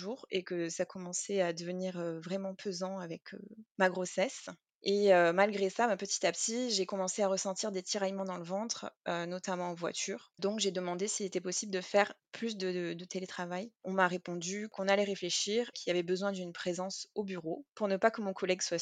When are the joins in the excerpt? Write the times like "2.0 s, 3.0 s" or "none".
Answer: 15.7 s